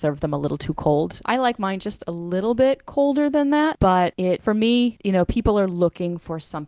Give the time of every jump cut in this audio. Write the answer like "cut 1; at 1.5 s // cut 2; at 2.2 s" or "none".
cut 1; at 1.2 s // cut 2; at 5.0 s